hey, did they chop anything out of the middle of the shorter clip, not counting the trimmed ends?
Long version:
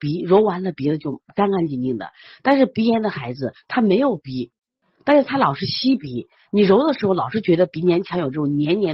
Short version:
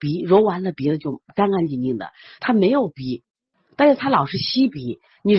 yes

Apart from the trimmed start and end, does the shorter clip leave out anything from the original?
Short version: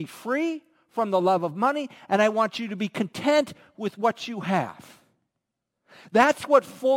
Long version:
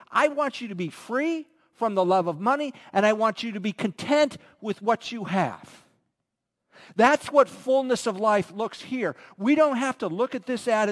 no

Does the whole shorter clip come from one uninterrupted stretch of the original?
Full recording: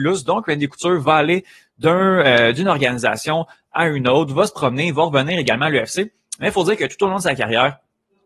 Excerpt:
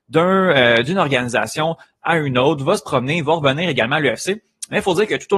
yes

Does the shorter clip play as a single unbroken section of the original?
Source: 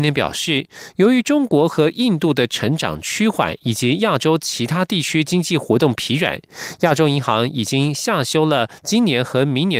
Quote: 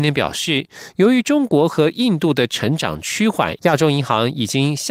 no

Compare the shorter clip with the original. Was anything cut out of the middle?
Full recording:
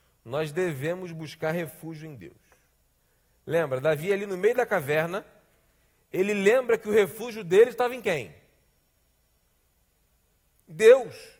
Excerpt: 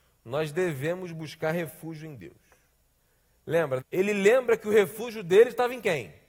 yes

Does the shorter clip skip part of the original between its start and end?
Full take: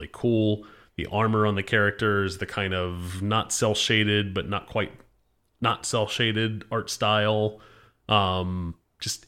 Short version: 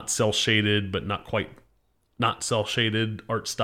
no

